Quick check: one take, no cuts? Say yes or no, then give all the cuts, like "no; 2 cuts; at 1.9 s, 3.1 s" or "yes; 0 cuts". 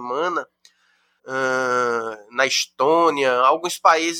no; 1 cut; at 1.2 s